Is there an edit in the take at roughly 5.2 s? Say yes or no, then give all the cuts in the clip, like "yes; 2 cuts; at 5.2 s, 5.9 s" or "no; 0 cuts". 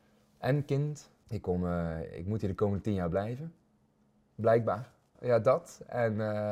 yes; 2 cuts; at 1.2 s, 5.2 s